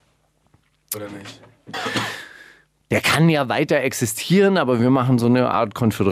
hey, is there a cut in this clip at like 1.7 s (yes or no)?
yes